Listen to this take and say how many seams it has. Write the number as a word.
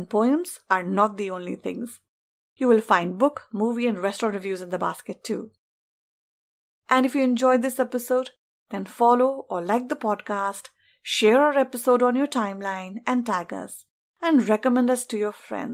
zero